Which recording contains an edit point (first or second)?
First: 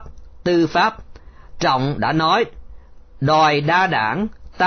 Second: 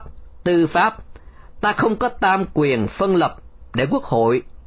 first